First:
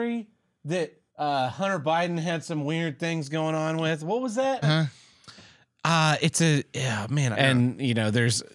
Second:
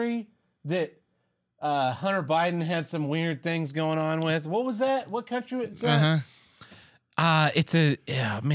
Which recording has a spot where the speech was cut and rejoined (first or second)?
first